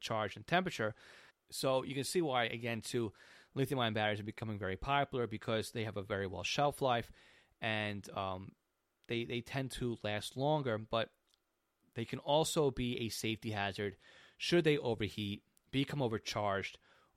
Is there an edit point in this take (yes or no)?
yes